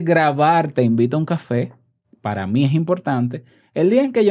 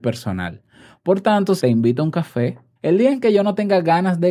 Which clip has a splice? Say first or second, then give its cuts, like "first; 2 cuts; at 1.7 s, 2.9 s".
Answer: second; 2 cuts; at 1.6 s, 2.8 s